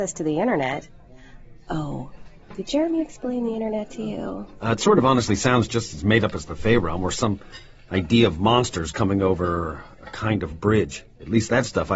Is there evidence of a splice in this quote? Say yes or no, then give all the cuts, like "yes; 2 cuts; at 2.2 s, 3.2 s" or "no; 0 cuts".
no; 0 cuts